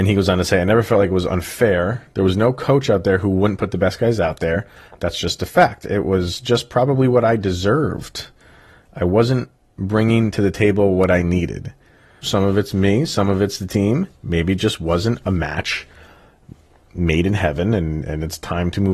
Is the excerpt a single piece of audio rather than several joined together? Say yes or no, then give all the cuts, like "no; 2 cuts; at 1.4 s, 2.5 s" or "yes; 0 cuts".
no; 1 cut; at 12.2 s